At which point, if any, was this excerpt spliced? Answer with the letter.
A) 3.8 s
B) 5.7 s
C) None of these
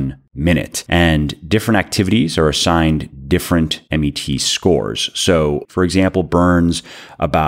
B